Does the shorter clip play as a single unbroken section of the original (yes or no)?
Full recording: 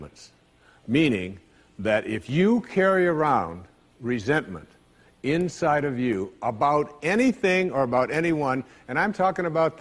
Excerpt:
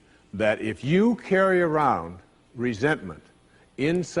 yes